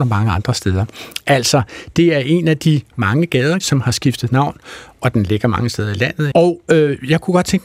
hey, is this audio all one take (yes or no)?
no